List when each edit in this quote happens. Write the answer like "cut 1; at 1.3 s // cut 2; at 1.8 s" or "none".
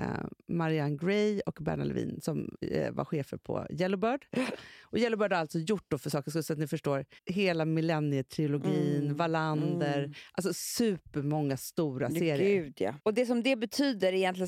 cut 1; at 7.2 s // cut 2; at 13.0 s